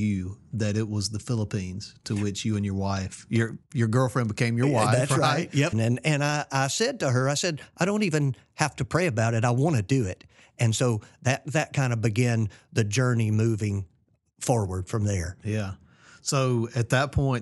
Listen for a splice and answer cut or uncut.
cut